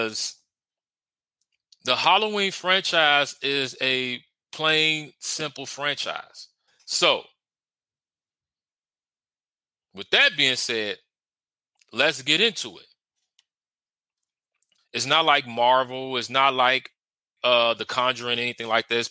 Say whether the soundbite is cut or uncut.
cut